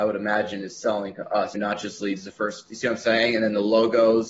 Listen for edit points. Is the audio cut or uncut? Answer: cut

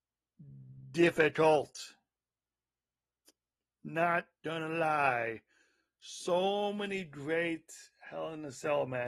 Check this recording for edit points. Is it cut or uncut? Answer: uncut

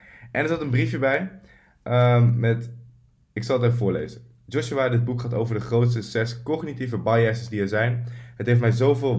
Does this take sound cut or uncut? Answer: uncut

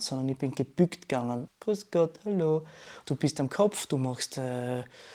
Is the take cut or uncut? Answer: cut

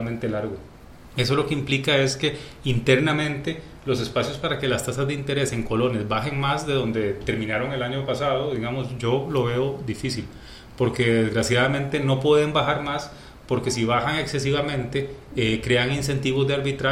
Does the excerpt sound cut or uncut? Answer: uncut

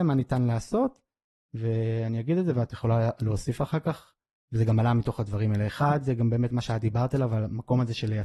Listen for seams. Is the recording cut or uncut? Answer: uncut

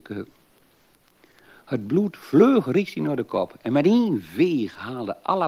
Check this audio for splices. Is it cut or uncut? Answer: uncut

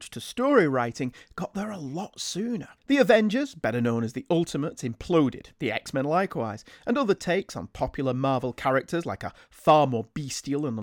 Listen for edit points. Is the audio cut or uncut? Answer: cut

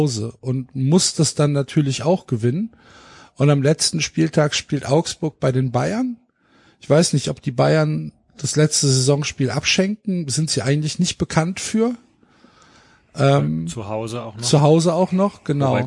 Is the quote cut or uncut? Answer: uncut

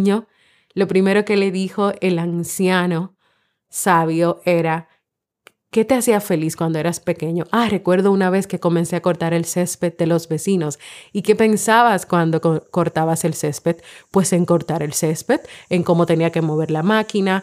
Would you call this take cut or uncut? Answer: uncut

